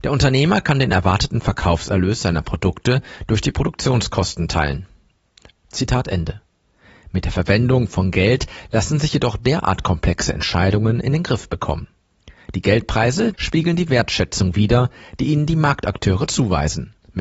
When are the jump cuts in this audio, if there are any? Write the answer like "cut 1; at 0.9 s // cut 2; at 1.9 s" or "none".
cut 1; at 5.5 s // cut 2; at 13.3 s

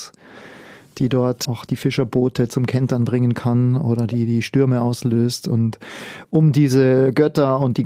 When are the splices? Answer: cut 1; at 1.5 s

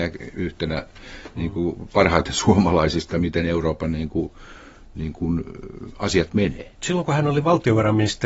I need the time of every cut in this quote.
cut 1; at 6.8 s

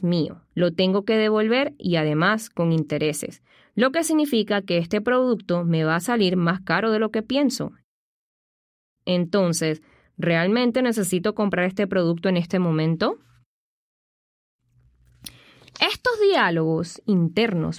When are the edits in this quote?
none

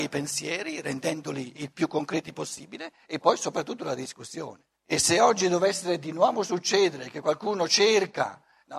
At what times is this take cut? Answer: cut 1; at 4.7 s

